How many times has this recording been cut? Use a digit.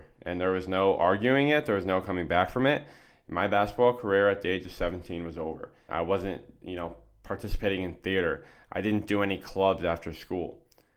1